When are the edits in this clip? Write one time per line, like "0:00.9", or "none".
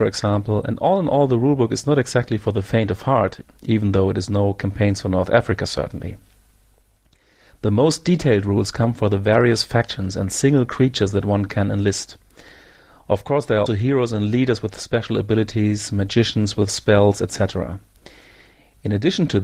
0:13.7